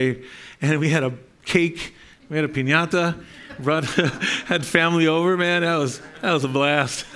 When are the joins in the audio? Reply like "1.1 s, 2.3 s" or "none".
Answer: none